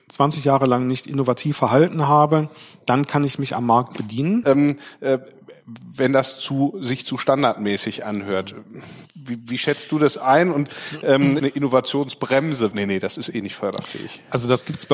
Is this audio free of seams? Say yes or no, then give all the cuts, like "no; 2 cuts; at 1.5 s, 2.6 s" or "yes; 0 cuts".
no; 3 cuts; at 4.4 s, 11.4 s, 12.7 s